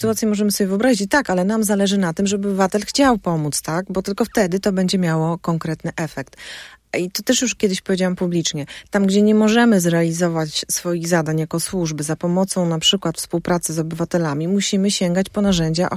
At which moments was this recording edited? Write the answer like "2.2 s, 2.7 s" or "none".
none